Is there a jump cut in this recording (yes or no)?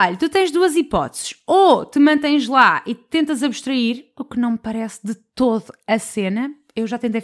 no